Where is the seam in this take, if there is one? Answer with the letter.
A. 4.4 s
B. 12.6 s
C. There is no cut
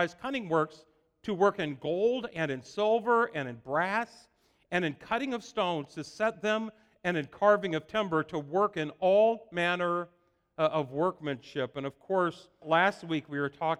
B